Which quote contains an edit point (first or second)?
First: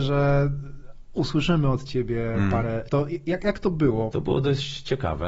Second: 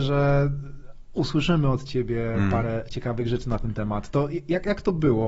first